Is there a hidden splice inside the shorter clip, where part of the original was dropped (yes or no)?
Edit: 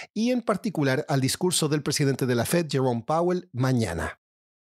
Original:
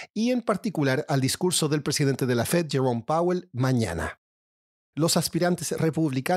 no